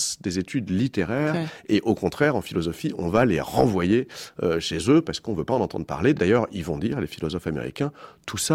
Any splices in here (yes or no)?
no